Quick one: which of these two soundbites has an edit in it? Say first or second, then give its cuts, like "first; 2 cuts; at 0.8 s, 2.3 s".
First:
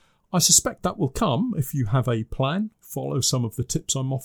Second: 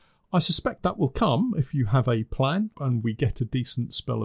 second; 1 cut; at 2.7 s